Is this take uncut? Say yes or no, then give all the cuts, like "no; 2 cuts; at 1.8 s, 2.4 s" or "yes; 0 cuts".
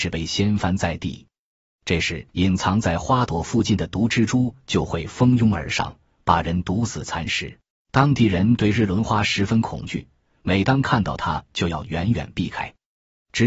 no; 2 cuts; at 2.3 s, 7.7 s